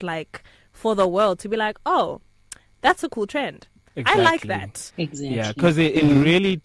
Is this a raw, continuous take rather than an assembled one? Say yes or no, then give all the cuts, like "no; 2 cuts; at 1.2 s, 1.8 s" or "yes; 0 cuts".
no; 1 cut; at 4.9 s